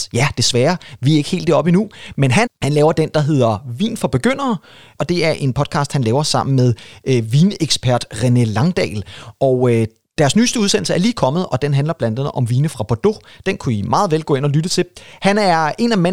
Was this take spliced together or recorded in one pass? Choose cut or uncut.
cut